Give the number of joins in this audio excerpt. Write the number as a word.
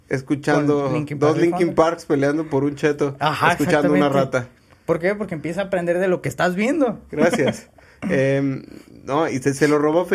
one